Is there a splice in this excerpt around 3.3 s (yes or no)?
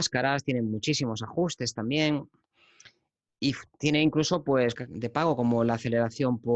no